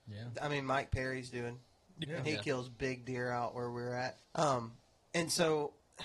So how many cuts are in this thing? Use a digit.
2